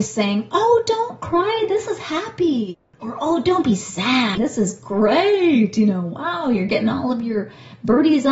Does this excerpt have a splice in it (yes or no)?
no